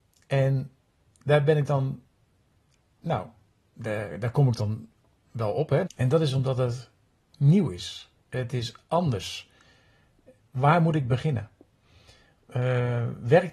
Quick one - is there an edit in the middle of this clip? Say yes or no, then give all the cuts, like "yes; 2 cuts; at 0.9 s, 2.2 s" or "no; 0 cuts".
yes; 2 cuts; at 5.9 s, 8.2 s